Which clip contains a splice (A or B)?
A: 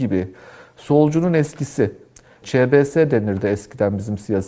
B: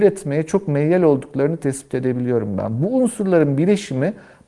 A